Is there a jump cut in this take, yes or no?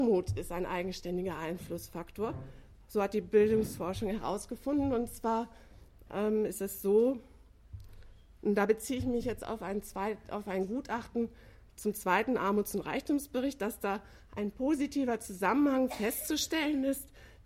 no